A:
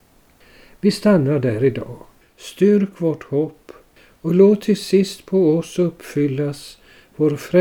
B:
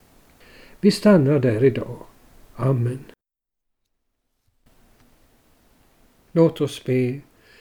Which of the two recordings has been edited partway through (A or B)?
A